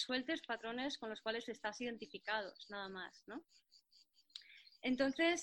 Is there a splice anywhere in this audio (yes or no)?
no